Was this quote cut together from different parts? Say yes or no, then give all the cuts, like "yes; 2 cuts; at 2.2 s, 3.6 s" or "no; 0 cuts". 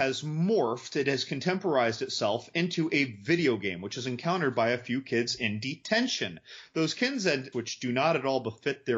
yes; 1 cut; at 7.5 s